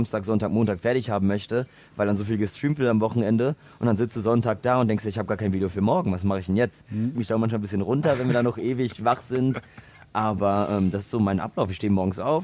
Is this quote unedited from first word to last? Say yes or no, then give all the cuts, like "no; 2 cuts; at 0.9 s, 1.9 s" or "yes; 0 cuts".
no; 1 cut; at 7.1 s